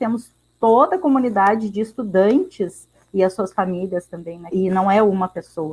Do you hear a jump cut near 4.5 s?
yes; 1 cut; at 4.5 s

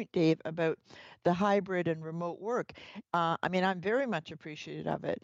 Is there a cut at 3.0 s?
yes; 1 cut; at 3.0 s

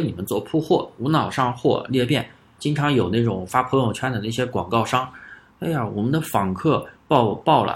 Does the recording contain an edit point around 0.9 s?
no; 2 cuts; at 2.6 s, 5.5 s

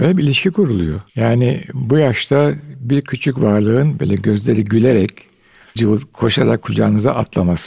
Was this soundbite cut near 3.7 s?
no; 2 cuts; at 1.1 s, 5.8 s

